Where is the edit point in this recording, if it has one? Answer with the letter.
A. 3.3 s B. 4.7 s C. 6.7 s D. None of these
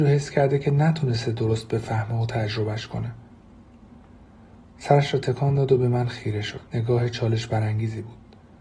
C